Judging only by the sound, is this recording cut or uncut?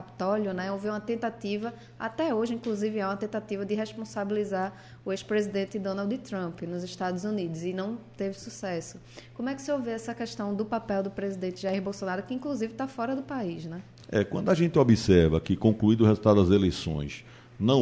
uncut